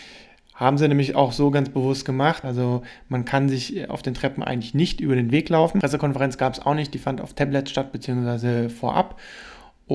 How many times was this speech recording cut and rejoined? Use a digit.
1